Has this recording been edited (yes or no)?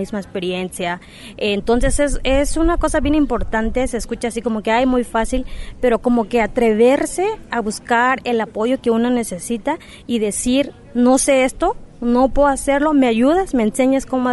no